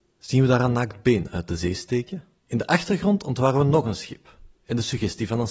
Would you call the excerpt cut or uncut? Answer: cut